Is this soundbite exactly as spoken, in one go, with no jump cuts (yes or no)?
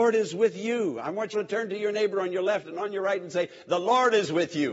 no